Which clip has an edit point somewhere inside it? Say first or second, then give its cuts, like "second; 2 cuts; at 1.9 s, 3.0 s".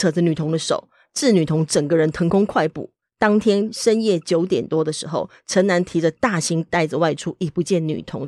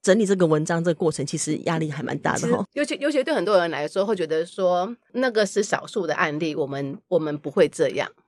second; 1 cut; at 2.6 s